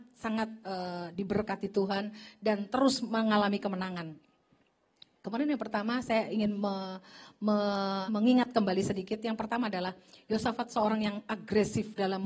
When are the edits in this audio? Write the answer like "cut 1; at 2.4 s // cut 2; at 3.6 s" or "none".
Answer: cut 1; at 8.1 s